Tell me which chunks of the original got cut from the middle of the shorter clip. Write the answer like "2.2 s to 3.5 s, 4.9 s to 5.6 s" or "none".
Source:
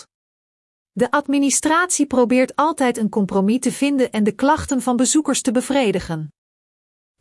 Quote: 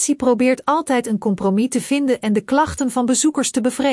none